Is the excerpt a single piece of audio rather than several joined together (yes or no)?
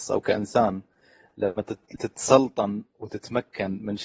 no